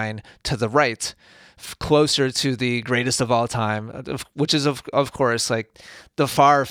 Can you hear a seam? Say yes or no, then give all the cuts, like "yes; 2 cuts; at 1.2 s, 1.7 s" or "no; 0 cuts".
no; 0 cuts